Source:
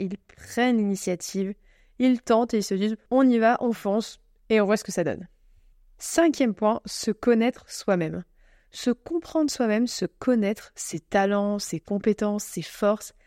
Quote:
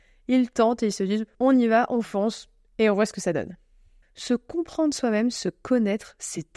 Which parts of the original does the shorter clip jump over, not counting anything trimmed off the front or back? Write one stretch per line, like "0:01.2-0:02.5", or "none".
0:05.7-0:08.6